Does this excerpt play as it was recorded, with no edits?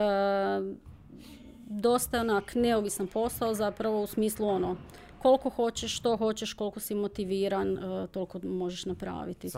yes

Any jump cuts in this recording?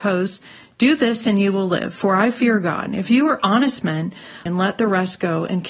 yes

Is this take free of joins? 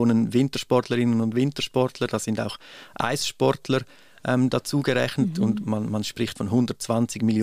yes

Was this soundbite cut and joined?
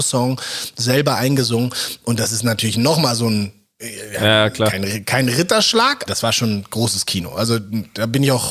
yes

